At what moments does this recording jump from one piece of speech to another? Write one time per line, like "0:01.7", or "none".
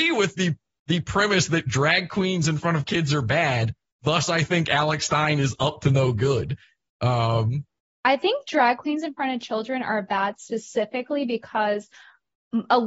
none